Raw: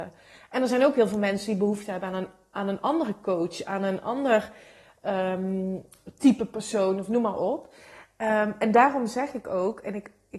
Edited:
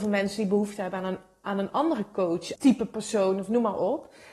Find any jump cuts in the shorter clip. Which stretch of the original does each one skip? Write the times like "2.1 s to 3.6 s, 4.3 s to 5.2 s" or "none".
3.6 s to 6.2 s